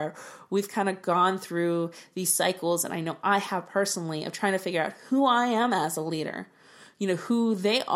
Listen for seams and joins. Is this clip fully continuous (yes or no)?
yes